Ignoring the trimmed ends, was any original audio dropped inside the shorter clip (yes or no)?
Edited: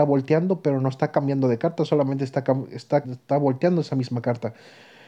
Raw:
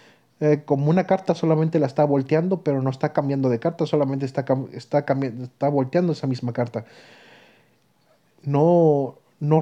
yes